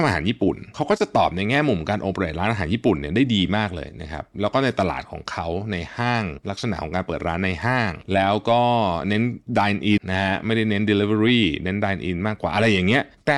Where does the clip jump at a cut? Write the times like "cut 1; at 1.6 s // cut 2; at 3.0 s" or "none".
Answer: cut 1; at 10.0 s

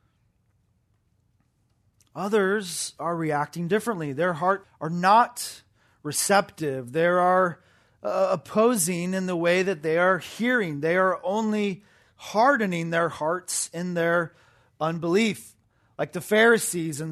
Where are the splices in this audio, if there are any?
cut 1; at 4.6 s

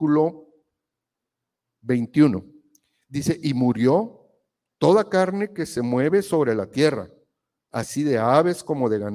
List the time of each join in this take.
none

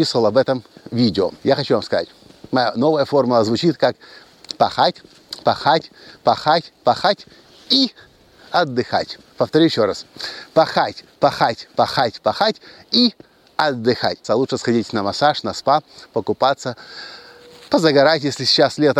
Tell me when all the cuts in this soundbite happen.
cut 1; at 1.4 s // cut 2; at 14.2 s

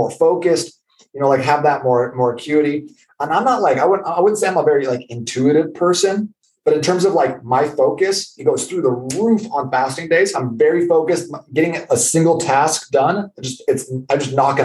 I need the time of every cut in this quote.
cut 1; at 8.4 s // cut 2; at 10.3 s

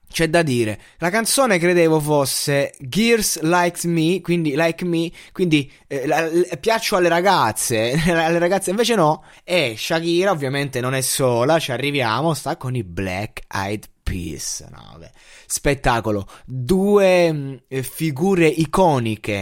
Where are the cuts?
cut 1; at 9.3 s

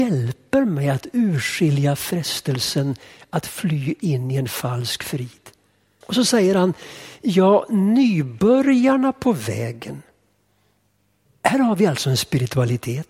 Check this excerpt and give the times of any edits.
cut 1; at 6.0 s // cut 2; at 11.3 s

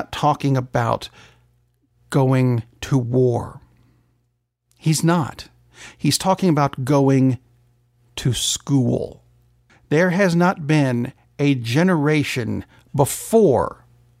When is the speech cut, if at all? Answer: none

